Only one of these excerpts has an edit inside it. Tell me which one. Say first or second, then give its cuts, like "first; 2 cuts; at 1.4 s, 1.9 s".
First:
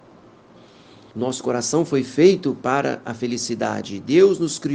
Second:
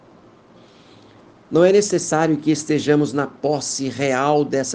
first; 1 cut; at 1.1 s